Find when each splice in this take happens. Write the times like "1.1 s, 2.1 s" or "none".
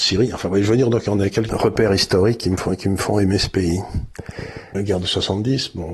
1.5 s, 4.7 s